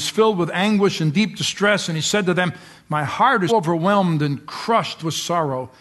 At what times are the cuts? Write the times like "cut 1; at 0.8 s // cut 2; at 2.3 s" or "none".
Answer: cut 1; at 3.5 s

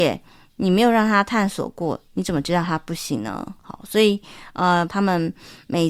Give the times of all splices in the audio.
cut 1; at 3.6 s // cut 2; at 4.9 s

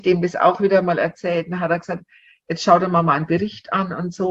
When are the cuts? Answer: none

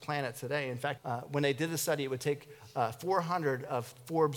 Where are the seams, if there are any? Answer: cut 1; at 1.0 s

